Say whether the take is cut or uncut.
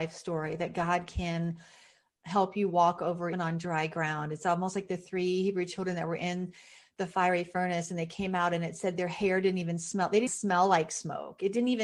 cut